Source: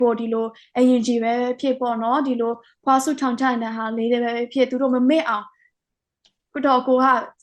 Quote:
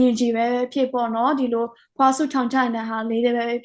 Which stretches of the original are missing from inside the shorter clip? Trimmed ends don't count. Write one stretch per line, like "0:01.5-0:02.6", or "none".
none